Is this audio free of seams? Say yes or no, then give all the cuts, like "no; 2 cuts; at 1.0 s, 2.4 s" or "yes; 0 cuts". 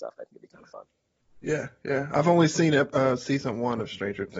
yes; 0 cuts